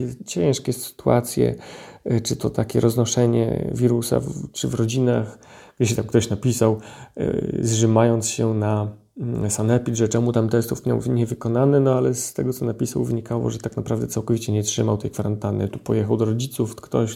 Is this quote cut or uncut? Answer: uncut